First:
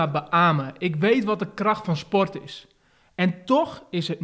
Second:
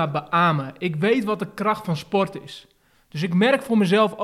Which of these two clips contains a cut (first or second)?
second